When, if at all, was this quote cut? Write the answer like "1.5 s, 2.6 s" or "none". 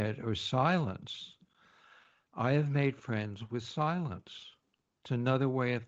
none